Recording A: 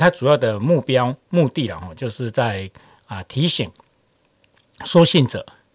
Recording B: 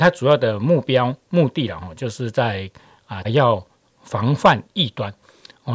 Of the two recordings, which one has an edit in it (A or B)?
B